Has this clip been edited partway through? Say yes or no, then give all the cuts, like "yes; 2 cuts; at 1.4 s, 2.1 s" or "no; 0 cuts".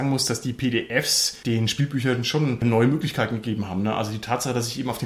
no; 0 cuts